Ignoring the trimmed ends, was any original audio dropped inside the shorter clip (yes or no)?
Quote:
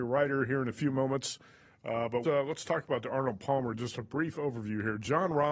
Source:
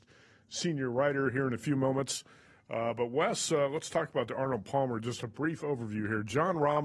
yes